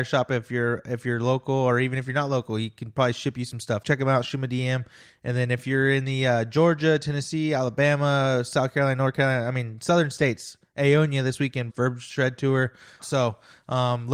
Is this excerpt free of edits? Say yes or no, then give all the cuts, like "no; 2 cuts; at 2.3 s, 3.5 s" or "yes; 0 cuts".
no; 3 cuts; at 3.8 s, 11.7 s, 13.0 s